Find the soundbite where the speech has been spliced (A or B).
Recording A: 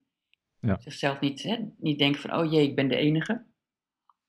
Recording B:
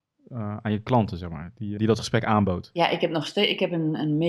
B